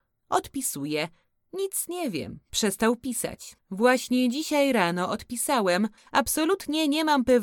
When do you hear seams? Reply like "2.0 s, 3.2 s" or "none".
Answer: 3.6 s, 6.0 s